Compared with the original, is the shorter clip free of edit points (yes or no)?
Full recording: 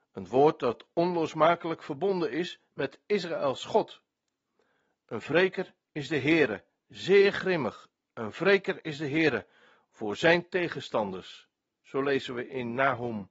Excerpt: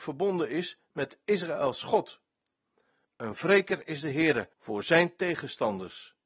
no